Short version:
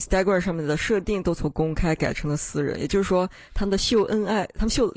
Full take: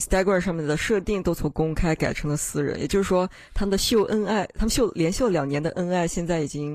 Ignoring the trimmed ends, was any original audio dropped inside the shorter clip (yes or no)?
no